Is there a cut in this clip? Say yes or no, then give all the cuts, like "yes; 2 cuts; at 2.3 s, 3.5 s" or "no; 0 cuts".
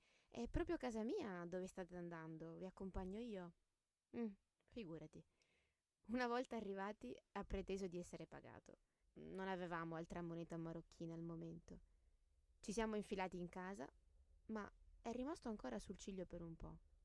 yes; 1 cut; at 9.0 s